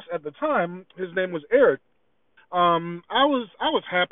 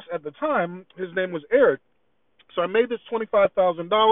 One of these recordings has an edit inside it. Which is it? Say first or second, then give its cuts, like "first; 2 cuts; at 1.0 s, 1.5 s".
first; 1 cut; at 2.4 s